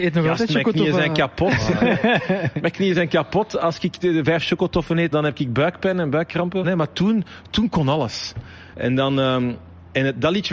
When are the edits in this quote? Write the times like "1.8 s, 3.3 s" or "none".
5.1 s, 6.6 s, 8.7 s